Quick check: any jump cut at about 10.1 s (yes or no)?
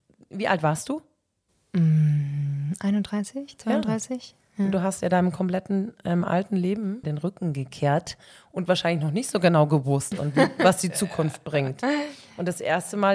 yes